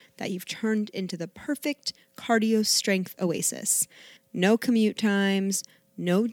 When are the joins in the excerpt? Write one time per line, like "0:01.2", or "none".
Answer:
0:04.2